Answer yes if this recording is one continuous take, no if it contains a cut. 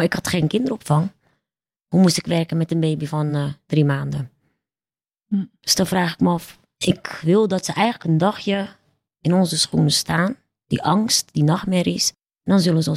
yes